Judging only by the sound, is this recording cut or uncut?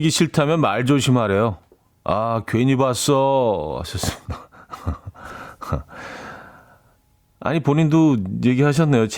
cut